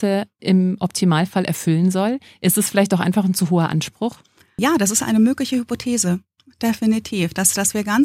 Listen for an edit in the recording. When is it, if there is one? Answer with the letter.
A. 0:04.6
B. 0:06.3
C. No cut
A